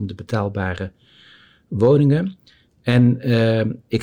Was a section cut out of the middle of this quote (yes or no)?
no